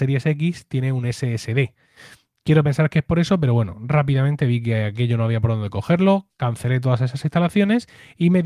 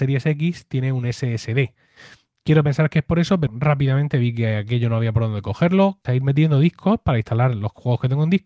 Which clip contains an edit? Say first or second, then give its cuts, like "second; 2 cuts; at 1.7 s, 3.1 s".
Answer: second; 2 cuts; at 3.5 s, 6.1 s